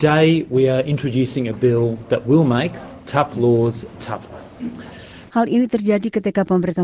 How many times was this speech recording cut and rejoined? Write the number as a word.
two